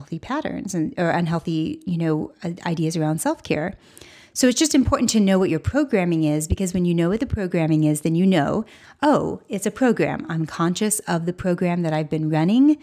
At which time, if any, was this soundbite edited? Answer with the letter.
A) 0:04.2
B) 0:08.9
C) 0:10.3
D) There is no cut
D